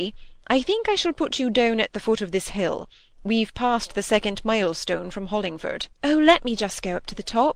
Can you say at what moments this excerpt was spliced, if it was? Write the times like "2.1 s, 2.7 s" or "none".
5.9 s